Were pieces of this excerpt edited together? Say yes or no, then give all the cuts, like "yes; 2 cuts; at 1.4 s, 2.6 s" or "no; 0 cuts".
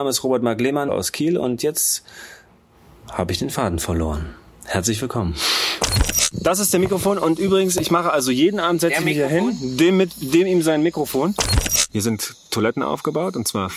no; 0 cuts